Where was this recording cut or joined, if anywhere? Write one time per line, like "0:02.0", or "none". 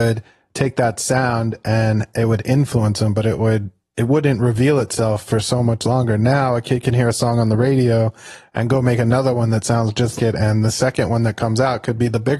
0:10.2